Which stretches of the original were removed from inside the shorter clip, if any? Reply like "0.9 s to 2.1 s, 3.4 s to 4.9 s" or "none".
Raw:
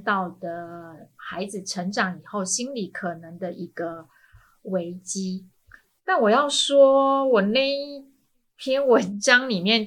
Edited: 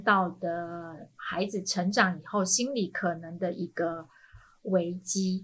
none